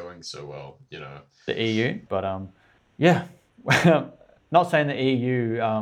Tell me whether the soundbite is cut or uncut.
cut